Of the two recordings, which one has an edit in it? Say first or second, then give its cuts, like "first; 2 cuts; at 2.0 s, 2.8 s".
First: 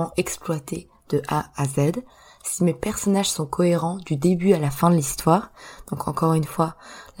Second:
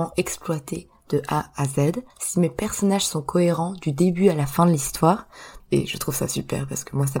second; 2 cuts; at 2.1 s, 5.6 s